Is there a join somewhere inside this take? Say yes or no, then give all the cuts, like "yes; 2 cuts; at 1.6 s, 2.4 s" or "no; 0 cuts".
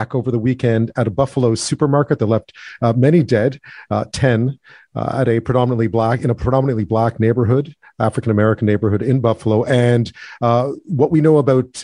no; 0 cuts